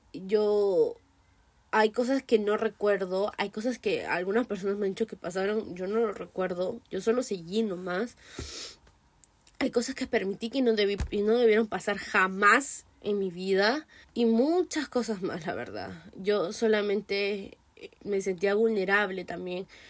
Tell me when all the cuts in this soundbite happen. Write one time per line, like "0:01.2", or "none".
0:14.0
0:18.0